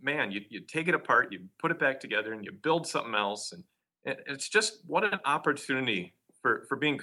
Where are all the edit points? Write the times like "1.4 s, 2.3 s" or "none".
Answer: none

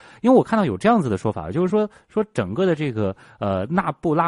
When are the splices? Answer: none

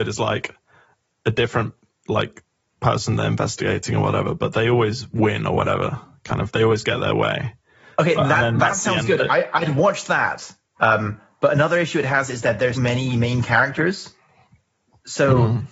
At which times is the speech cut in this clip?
10.8 s, 12.8 s

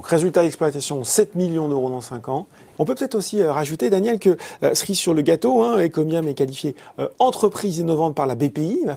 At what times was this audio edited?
2.8 s

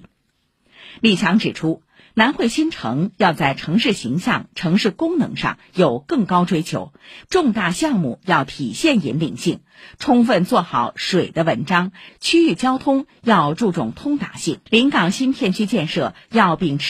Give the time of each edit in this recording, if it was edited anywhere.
7.2 s, 12.1 s, 14.7 s

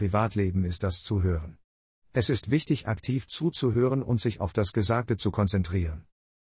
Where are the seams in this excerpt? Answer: none

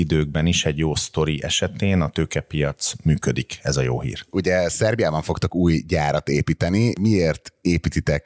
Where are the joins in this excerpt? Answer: none

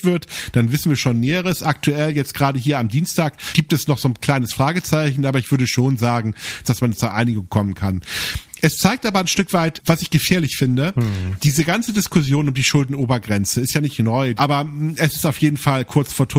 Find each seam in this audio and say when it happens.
6.6 s, 14.4 s

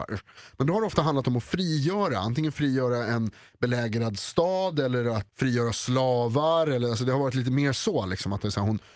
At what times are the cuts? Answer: 5.3 s

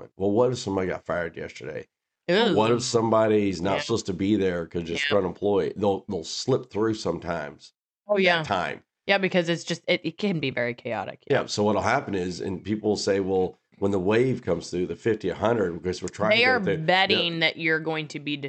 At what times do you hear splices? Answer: none

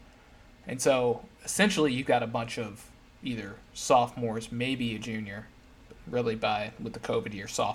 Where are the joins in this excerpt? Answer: none

